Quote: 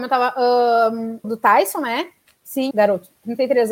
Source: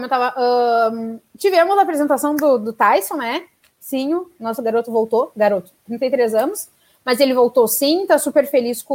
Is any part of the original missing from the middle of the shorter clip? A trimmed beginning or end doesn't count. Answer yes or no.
yes